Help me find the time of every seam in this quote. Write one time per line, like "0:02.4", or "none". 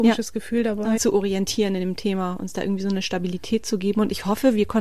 0:01.0